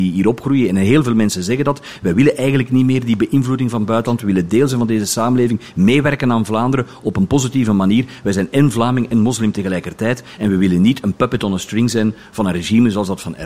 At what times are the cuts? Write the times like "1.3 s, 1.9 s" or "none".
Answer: none